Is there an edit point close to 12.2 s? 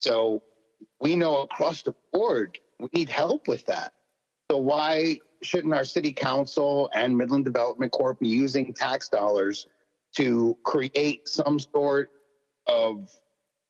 no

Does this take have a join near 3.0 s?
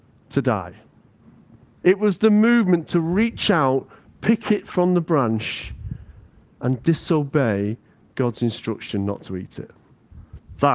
no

